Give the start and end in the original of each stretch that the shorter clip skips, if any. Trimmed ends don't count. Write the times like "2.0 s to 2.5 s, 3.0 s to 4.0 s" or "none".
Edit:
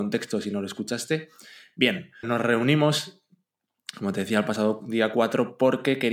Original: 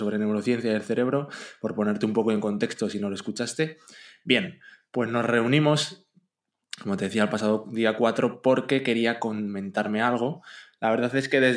4.7 s to 5.1 s